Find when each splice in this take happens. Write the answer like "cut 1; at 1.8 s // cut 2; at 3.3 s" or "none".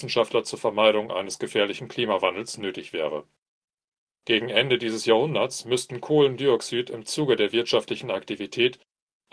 none